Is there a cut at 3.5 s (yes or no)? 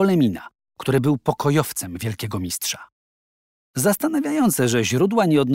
yes